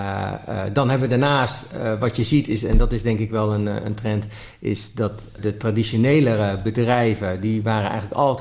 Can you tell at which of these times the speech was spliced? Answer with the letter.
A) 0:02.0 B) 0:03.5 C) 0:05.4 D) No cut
C